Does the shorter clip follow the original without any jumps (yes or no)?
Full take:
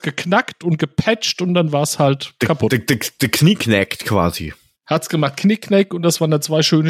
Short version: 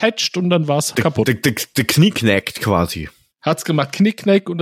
no